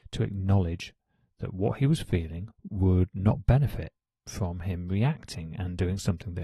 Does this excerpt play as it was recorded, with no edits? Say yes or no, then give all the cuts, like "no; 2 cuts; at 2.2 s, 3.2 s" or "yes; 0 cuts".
no; 1 cut; at 2.5 s